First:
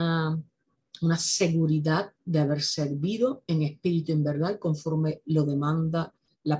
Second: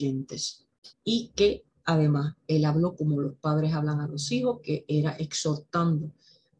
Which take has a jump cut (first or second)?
second